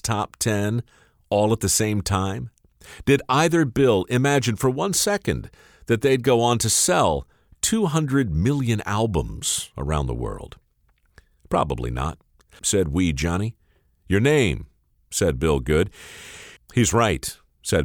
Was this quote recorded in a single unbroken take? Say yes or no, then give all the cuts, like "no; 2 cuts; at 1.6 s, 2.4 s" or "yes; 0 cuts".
no; 2 cuts; at 12.6 s, 16.6 s